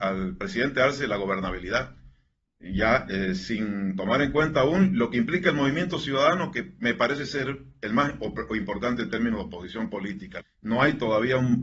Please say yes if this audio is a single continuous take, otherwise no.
no